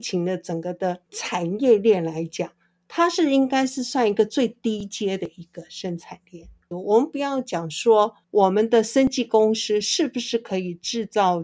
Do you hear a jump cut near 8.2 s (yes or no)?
yes